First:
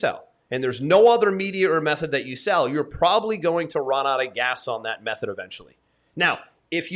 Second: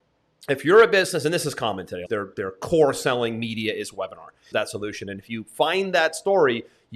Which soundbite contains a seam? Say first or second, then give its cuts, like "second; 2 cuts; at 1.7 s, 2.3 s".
second; 2 cuts; at 2.1 s, 4.5 s